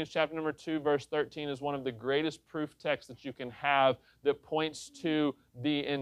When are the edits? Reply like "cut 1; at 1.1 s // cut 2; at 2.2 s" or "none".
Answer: none